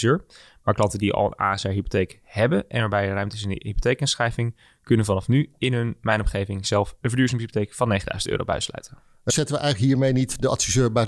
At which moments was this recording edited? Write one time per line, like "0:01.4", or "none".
0:09.3